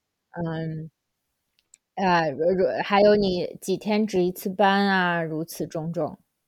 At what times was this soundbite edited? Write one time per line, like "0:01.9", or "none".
none